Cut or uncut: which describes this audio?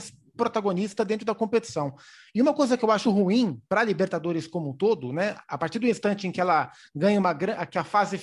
cut